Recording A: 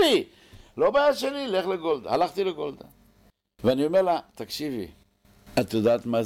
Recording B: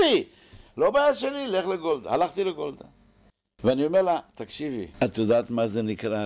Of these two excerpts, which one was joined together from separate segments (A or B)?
B